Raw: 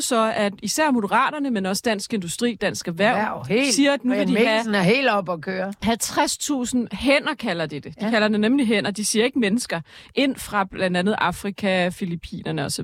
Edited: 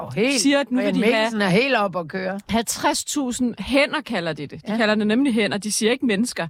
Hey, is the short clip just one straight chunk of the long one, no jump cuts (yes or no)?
yes